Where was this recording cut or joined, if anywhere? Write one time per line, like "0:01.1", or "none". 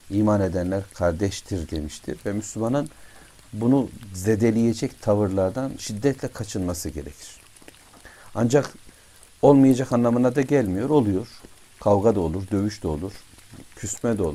none